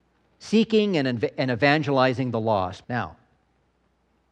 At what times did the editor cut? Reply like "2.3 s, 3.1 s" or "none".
2.8 s